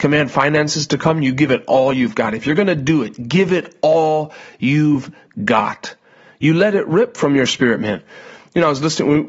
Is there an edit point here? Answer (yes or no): no